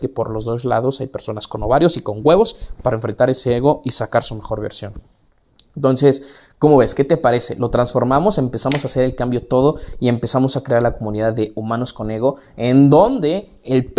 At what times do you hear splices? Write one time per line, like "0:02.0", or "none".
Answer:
none